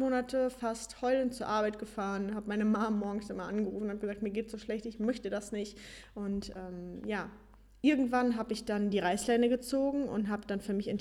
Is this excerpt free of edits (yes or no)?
yes